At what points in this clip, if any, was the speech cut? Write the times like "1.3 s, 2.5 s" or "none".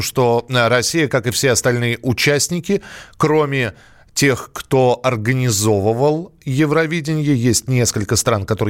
none